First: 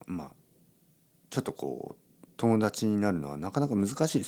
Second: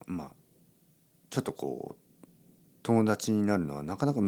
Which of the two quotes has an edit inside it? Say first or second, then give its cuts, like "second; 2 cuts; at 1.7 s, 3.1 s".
first; 1 cut; at 2.3 s